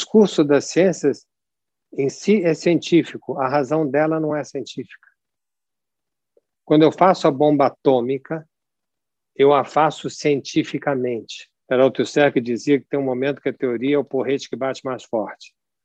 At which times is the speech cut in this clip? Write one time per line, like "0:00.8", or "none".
0:11.6